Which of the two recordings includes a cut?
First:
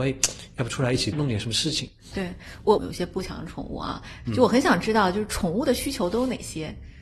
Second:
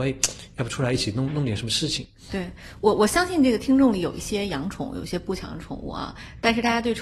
first; 3 cuts; at 1.1 s, 2.8 s, 4.3 s

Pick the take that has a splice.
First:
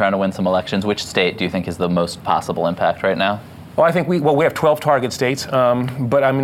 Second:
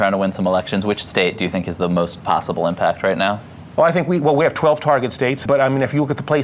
second; 1 cut; at 5.5 s

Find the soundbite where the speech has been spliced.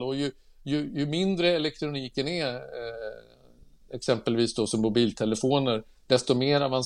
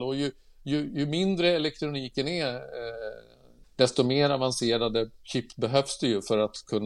second; 1 cut; at 3.6 s

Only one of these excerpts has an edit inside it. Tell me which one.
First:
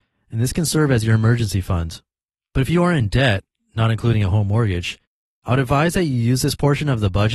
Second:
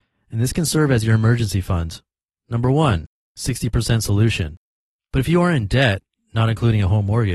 second; 2 cuts; at 2.4 s, 5.0 s

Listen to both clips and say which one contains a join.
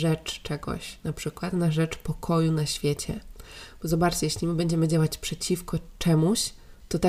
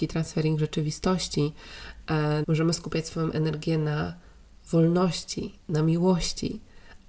second; 1 cut; at 2.4 s

